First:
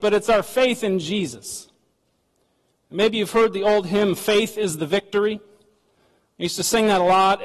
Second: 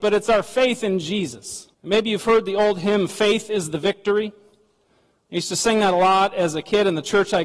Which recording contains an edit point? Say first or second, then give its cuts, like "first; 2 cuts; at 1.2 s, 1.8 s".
second; 1 cut; at 1.7 s